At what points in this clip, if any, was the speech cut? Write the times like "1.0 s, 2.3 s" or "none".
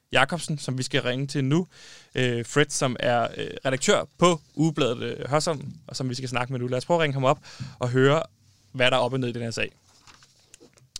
none